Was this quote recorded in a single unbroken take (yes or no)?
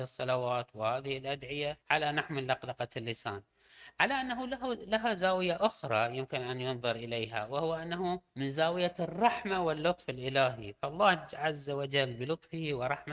no